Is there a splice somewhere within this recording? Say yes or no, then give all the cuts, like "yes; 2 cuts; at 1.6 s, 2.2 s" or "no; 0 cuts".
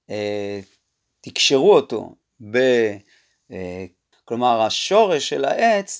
yes; 1 cut; at 4.1 s